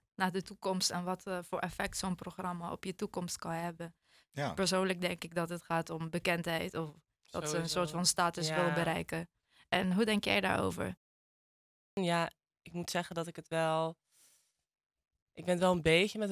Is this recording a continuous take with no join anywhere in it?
yes; 0 cuts

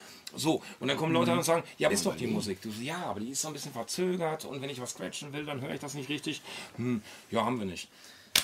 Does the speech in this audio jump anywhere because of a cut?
yes; 1 cut; at 1.9 s

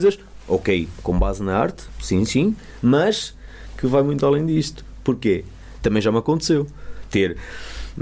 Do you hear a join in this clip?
yes; 1 cut; at 5.8 s

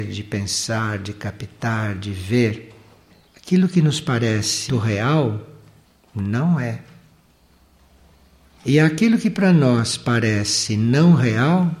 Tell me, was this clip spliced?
yes; 1 cut; at 4.7 s

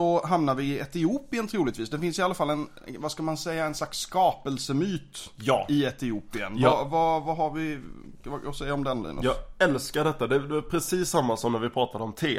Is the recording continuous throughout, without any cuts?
yes; 0 cuts

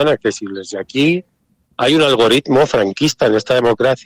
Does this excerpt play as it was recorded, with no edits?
yes; 0 cuts

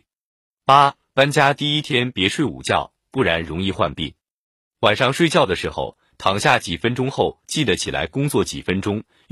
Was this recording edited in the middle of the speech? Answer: no; 0 cuts

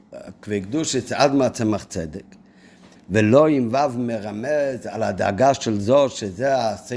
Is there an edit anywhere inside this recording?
yes; 1 cut; at 3.0 s

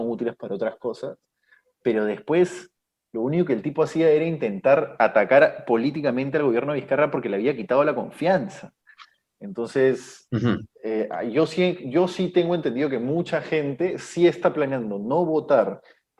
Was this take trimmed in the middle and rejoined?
no; 0 cuts

